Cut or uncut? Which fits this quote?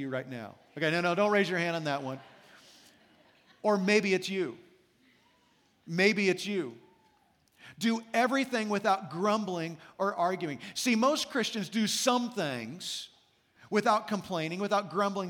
uncut